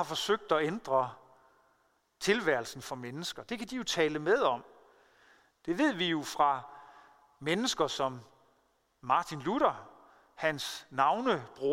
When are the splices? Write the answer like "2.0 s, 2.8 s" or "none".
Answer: none